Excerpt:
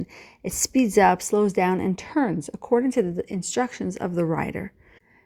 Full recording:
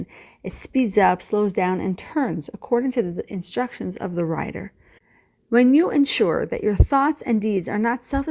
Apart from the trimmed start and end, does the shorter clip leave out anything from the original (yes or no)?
no